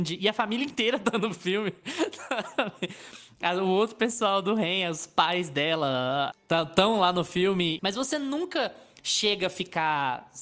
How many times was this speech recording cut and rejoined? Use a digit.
2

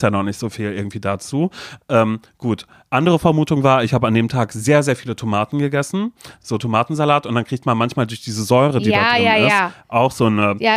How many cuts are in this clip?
0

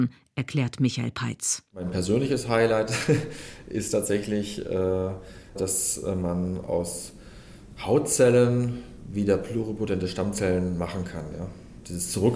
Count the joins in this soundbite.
1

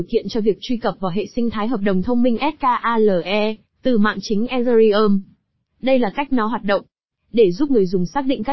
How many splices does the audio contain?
1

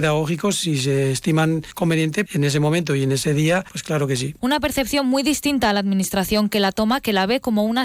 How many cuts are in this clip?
2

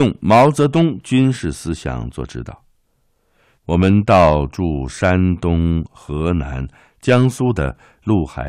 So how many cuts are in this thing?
1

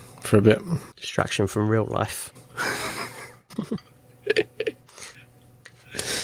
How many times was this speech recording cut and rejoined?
2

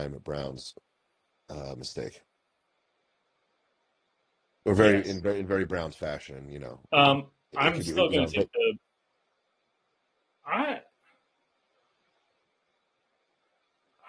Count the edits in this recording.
1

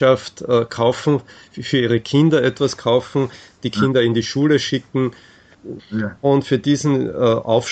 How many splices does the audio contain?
1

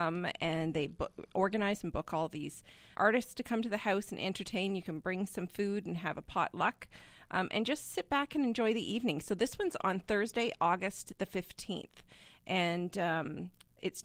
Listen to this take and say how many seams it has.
1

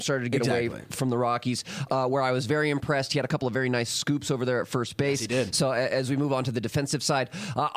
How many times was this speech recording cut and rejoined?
1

